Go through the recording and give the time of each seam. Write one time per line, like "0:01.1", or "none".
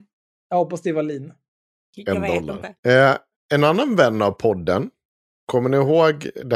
0:02.8